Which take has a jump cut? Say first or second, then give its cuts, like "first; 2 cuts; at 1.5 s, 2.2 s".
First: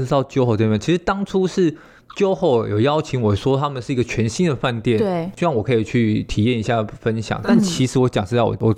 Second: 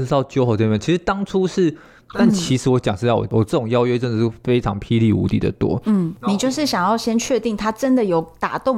second; 1 cut; at 2.1 s